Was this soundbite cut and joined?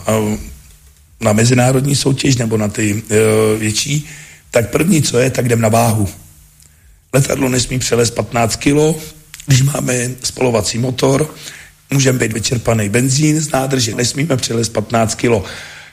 yes; 2 cuts; at 12.3 s, 13.9 s

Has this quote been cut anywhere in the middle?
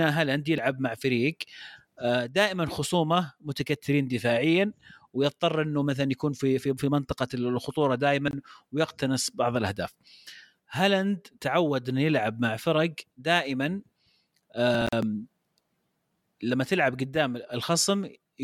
yes; 1 cut; at 10.6 s

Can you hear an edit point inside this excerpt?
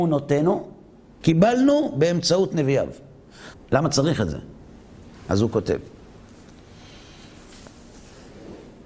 yes; 2 cuts; at 1.2 s, 3.5 s

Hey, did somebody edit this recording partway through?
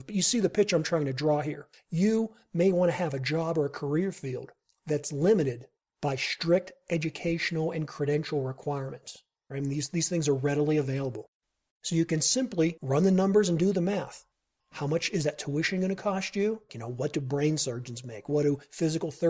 yes; 2 cuts; at 9.5 s, 16.7 s

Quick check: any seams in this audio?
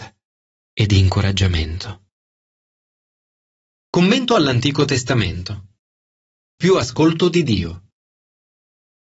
no; 0 cuts

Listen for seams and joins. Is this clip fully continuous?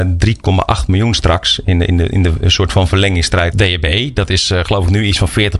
no; 1 cut; at 3.5 s

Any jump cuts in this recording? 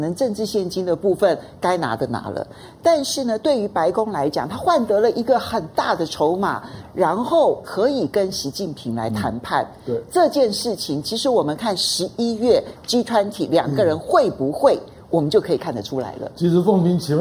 no; 0 cuts

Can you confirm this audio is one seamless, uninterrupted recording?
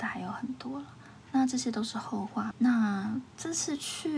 no; 1 cut; at 2.5 s

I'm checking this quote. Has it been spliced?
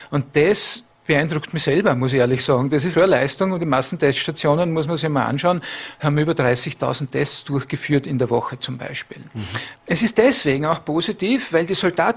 yes; 2 cuts; at 2.9 s, 9.7 s

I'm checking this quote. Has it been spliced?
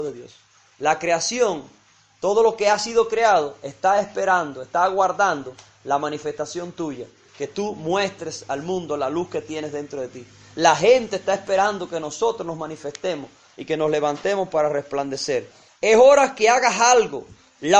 yes; 2 cuts; at 7.3 s, 15.7 s

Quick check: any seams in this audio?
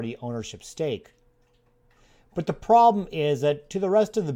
no; 0 cuts

